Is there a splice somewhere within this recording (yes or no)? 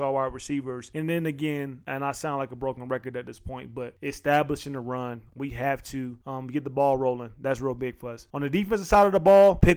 no